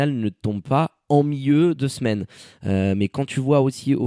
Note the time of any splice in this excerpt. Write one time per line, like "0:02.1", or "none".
none